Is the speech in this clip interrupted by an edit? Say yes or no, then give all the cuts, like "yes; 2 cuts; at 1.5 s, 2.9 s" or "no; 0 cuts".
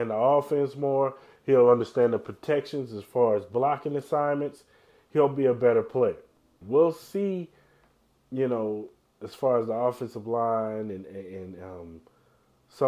yes; 1 cut; at 6.6 s